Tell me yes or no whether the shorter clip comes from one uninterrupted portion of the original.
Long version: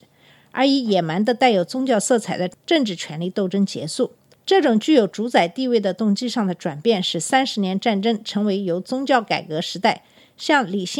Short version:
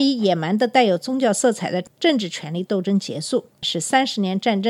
no